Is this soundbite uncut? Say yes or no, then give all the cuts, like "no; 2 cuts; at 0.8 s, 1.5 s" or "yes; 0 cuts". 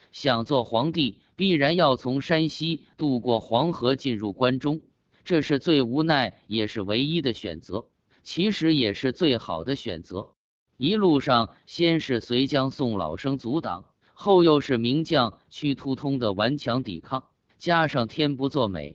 yes; 0 cuts